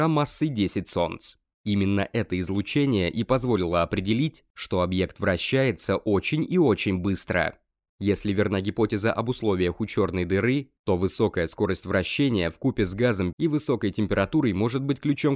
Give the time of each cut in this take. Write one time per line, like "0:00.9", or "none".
0:07.9
0:13.3